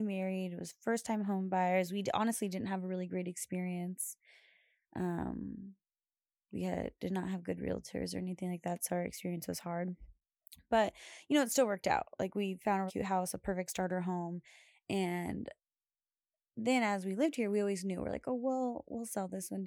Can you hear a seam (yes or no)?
yes